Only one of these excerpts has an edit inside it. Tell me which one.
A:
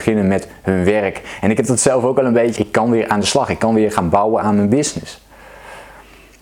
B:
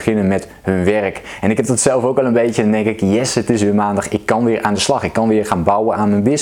A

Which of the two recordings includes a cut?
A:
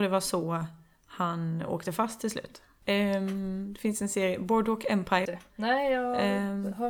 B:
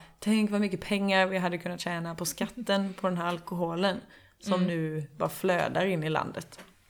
A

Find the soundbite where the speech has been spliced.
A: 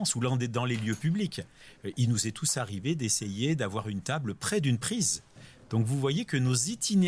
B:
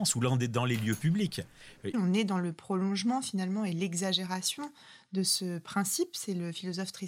B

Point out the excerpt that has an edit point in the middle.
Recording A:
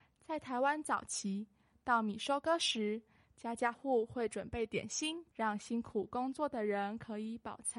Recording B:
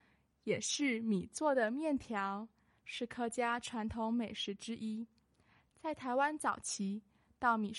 A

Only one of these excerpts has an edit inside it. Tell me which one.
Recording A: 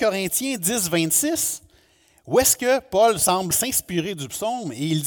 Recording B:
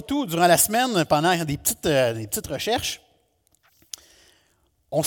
A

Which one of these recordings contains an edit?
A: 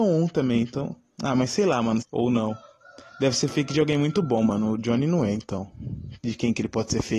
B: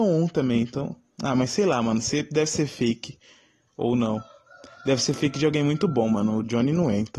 A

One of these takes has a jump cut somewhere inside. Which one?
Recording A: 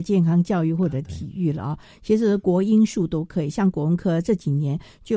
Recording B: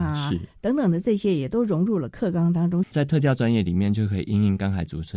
B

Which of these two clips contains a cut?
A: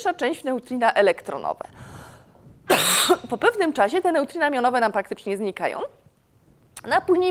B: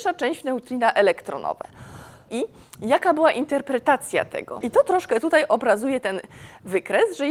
B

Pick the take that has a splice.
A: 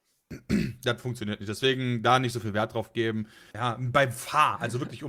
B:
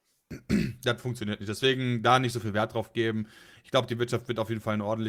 A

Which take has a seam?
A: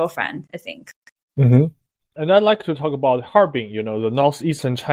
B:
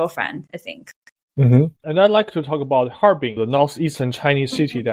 B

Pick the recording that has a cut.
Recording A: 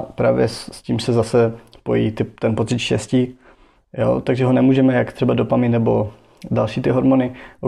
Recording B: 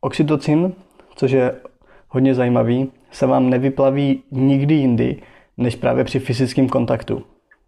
A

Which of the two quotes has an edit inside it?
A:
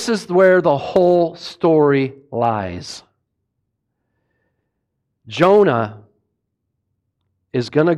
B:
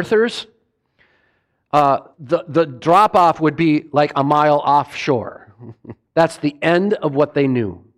B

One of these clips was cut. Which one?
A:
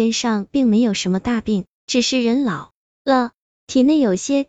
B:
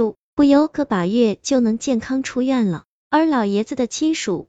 B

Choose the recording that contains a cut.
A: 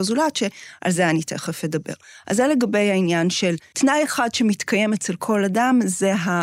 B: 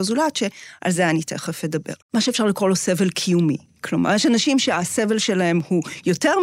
B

